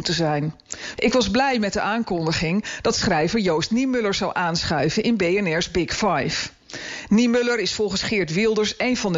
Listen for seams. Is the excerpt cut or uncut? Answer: cut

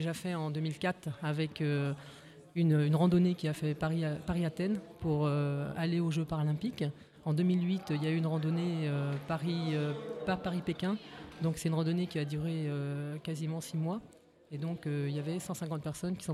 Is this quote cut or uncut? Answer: uncut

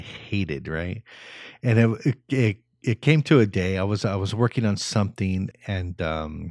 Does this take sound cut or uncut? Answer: cut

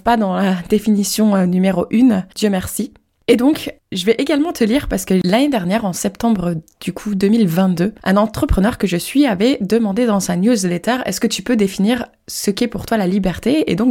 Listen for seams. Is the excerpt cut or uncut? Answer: uncut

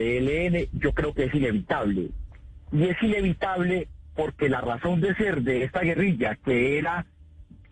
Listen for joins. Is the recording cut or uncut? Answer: uncut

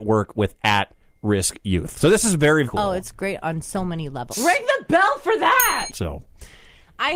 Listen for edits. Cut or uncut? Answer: cut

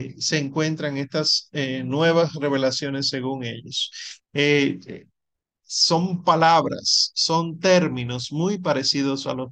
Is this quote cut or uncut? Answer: cut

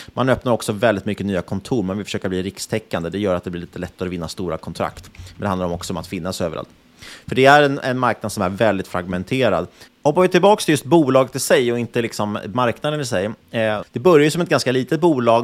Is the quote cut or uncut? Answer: cut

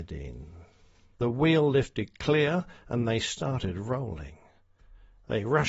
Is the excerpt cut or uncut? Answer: cut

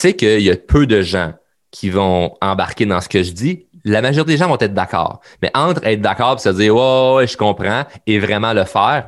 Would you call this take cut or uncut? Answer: uncut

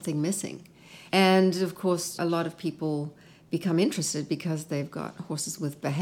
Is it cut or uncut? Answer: cut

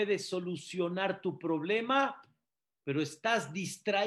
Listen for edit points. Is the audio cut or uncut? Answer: uncut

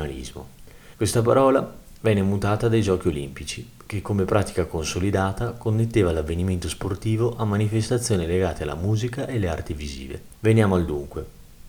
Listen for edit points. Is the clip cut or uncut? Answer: cut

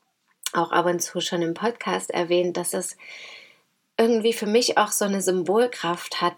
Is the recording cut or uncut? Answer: uncut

